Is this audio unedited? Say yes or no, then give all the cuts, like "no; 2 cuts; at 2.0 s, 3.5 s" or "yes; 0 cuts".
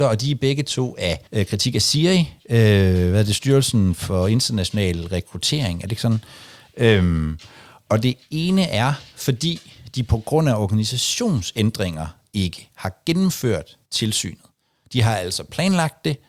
no; 2 cuts; at 1.3 s, 13.9 s